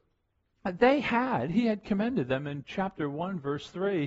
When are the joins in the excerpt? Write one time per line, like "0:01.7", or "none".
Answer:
none